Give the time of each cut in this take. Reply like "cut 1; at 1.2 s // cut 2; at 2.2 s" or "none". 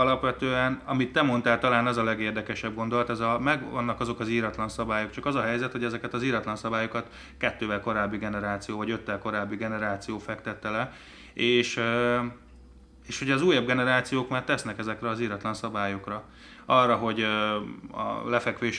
none